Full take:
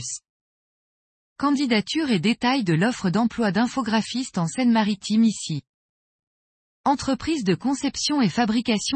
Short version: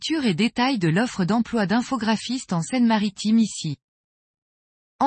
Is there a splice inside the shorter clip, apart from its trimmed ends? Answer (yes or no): no